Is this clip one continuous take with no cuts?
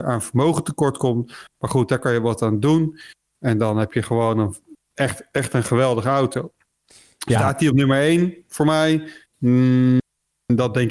yes; 0 cuts

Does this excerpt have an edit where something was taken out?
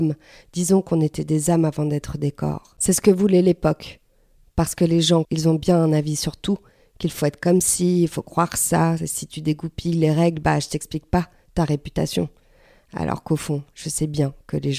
yes; 1 cut; at 5.2 s

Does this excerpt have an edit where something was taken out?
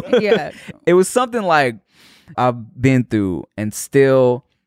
yes; 1 cut; at 2.3 s

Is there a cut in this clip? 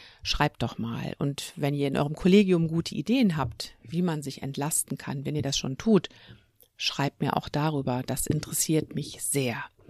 no; 0 cuts

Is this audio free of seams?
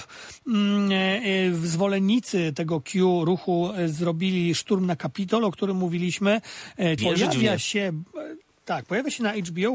no; 1 cut; at 7.0 s

